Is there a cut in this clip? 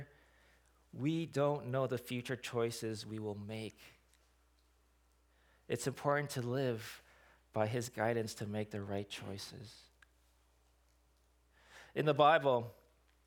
no; 0 cuts

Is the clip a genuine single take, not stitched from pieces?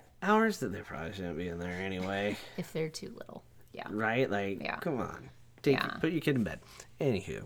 yes; 0 cuts

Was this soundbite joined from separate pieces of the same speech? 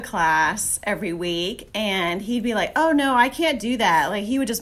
no; 0 cuts

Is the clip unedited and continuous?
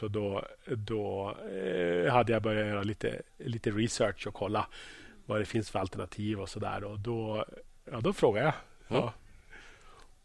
yes; 0 cuts

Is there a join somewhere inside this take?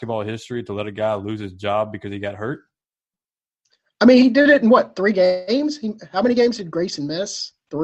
no; 0 cuts

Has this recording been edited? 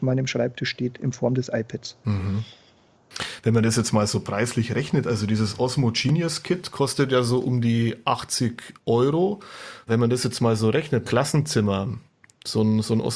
yes; 2 cuts; at 9.9 s, 11.0 s

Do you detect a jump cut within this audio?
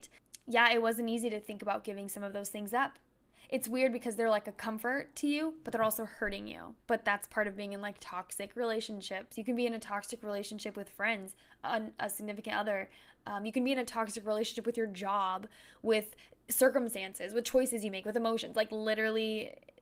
yes; 1 cut; at 6.8 s

